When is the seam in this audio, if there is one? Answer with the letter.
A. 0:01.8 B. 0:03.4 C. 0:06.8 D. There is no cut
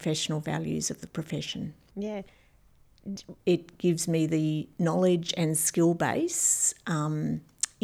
B